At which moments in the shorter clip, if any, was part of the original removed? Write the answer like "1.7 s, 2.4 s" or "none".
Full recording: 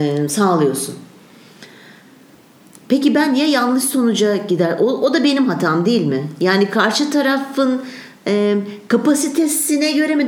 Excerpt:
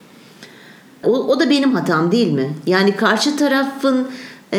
1.0 s